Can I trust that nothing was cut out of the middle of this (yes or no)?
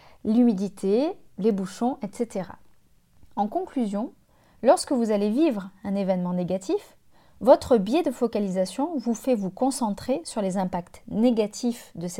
yes